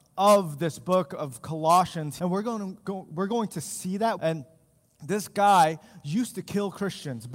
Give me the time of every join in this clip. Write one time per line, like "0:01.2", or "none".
0:02.2
0:04.2

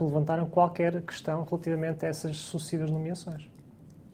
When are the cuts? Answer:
none

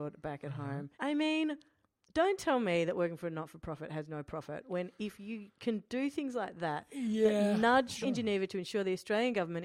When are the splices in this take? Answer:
0:00.9
0:08.0

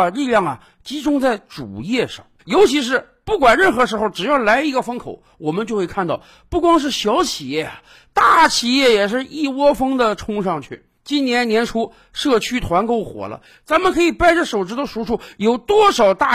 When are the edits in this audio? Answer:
0:02.4

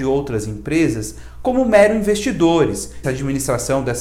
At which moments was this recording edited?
0:03.0

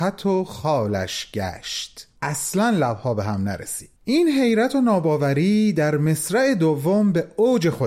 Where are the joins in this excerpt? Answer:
0:02.2
0:04.0

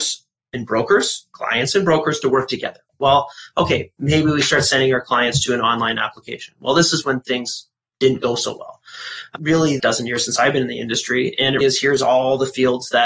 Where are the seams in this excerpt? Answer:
0:02.9
0:09.8
0:11.6

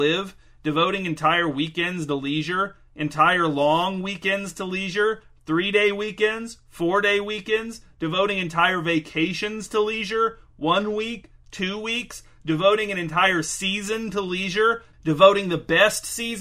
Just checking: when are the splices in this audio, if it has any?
none

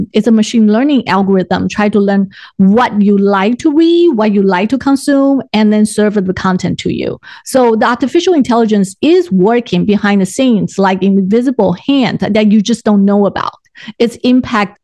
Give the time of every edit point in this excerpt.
none

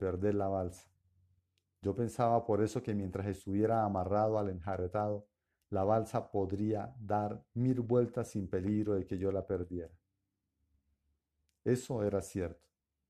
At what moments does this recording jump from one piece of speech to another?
none

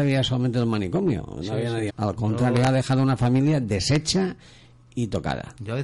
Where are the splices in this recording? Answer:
0:01.9

